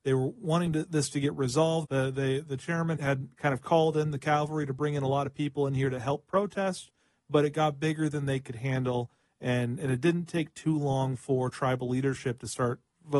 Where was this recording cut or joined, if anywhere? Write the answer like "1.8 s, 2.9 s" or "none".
1.8 s, 3.0 s